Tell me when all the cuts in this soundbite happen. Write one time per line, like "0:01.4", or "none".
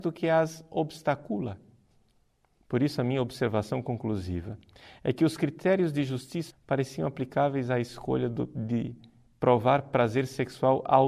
0:06.5